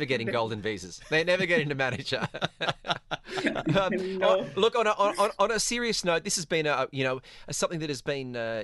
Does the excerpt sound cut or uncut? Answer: uncut